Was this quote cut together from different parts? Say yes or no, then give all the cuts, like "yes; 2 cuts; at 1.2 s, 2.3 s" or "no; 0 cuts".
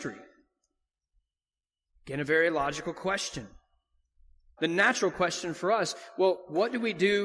yes; 2 cuts; at 1.9 s, 4.6 s